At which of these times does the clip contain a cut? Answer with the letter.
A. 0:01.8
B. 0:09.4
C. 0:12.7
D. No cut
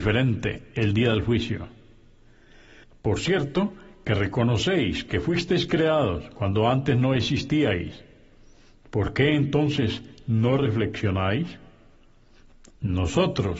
C